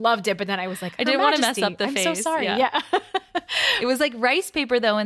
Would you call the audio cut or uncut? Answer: uncut